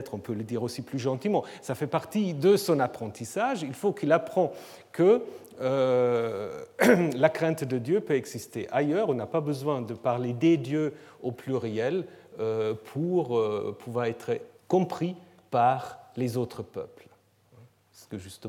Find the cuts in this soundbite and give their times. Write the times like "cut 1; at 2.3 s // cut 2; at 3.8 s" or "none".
cut 1; at 14.6 s